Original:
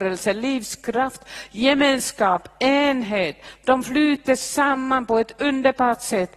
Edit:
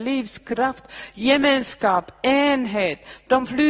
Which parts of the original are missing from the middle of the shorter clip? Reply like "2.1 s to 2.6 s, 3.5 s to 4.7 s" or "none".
none